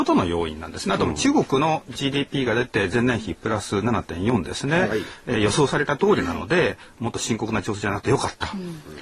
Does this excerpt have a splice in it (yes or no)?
no